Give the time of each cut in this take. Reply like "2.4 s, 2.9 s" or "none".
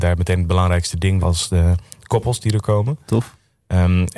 1.2 s